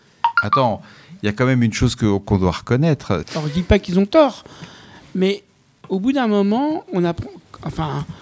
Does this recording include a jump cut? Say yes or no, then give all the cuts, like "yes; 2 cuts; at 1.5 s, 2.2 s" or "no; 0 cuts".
yes; 1 cut; at 3.2 s